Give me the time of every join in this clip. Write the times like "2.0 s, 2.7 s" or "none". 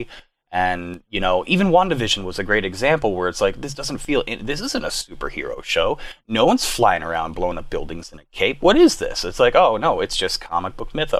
none